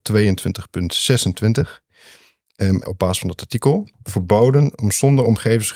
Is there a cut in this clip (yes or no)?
yes